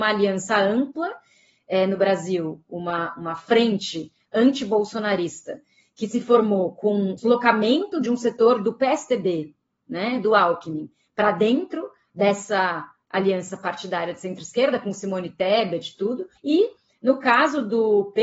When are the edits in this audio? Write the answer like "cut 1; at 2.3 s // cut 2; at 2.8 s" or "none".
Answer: cut 1; at 7.2 s // cut 2; at 16.4 s

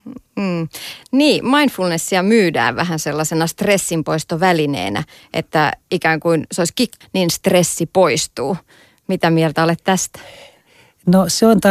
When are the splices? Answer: cut 1; at 7.0 s

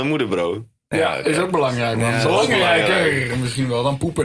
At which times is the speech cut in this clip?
none

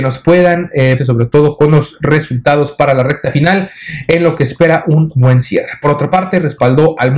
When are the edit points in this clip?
cut 1; at 1.0 s

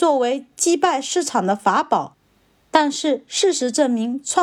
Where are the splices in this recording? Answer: none

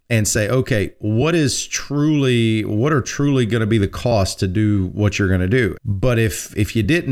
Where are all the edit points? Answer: cut 1; at 5.8 s

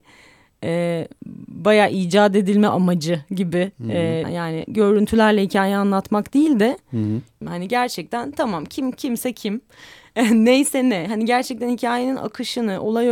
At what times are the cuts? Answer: cut 1; at 4.2 s // cut 2; at 7.4 s

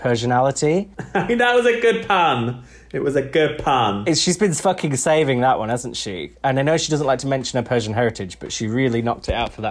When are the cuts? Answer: none

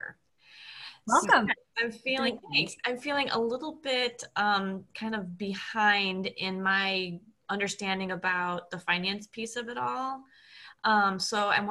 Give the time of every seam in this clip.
none

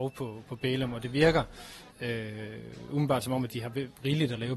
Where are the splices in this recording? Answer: cut 1; at 1.9 s

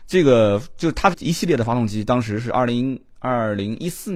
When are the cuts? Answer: cut 1; at 1.1 s

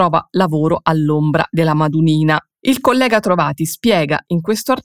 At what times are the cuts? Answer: cut 1; at 2.6 s

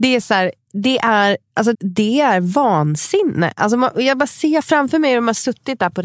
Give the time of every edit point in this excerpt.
cut 1; at 1.7 s

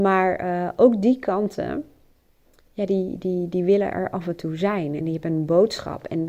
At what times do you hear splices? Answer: none

